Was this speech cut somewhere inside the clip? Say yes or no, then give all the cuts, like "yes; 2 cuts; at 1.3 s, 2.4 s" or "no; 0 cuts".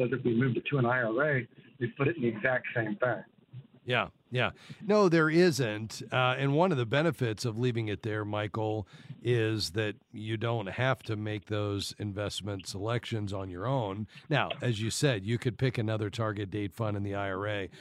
no; 0 cuts